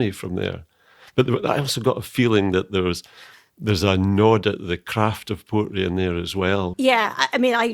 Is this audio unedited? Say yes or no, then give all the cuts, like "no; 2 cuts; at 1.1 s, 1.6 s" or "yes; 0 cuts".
no; 1 cut; at 6.7 s